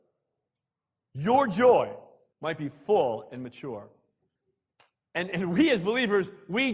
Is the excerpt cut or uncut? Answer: uncut